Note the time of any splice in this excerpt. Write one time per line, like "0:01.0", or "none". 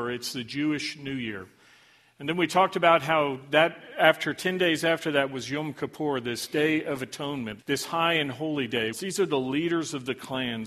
0:07.6
0:08.9